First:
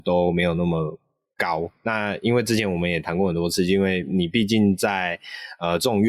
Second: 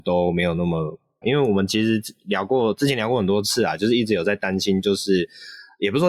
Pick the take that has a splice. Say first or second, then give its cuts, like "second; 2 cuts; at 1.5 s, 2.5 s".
second; 1 cut; at 1.2 s